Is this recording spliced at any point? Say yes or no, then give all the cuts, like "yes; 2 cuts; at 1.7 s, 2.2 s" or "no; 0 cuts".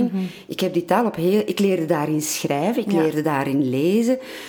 no; 0 cuts